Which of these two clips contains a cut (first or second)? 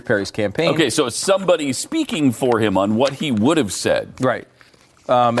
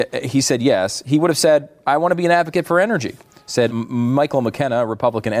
second